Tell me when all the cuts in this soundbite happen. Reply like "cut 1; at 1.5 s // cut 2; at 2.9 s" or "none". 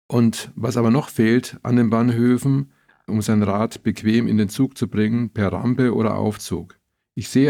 cut 1; at 3.1 s